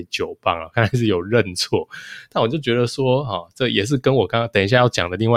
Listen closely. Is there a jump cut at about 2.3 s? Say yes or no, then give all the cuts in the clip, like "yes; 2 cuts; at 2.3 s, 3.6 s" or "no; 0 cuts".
no; 0 cuts